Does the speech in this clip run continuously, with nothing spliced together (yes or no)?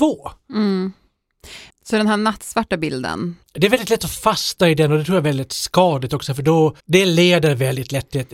no